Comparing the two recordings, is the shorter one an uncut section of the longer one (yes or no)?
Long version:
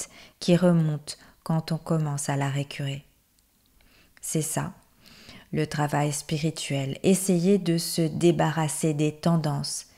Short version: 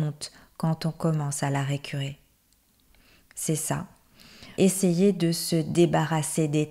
no